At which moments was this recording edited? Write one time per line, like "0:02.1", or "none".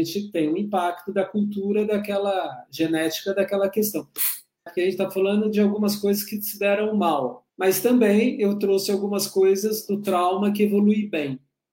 0:04.7
0:07.5